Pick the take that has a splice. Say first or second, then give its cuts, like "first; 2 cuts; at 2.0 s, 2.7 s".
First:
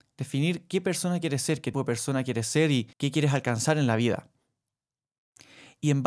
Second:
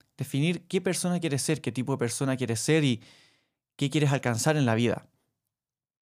first; 2 cuts; at 1.7 s, 2.9 s